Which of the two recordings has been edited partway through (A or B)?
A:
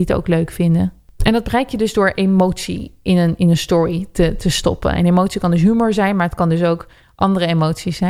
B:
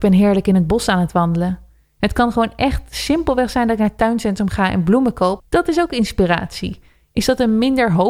B